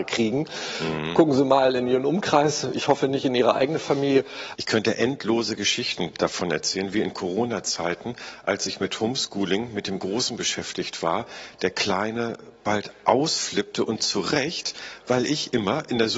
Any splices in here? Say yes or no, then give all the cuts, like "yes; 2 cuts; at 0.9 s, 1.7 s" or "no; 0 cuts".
yes; 1 cut; at 4.5 s